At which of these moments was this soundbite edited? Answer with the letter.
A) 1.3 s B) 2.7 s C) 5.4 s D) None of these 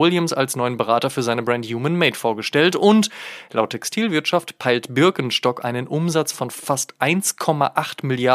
D